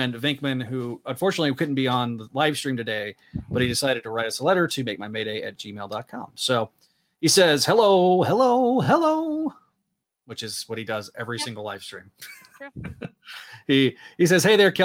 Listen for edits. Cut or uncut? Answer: uncut